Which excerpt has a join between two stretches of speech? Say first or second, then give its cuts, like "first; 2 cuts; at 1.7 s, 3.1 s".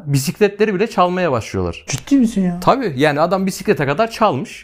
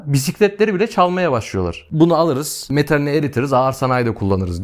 first; 1 cut; at 1.9 s